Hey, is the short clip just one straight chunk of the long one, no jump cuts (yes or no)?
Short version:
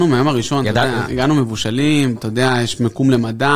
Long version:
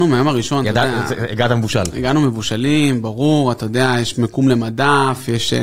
no